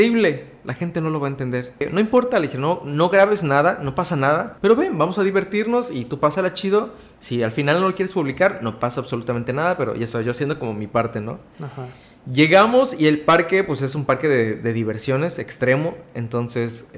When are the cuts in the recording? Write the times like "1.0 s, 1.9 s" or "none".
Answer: none